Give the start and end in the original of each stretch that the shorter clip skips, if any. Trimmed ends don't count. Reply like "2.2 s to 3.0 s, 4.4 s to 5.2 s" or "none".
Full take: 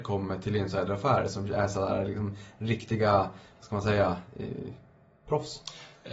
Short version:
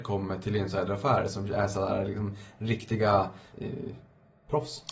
3.5 s to 4.3 s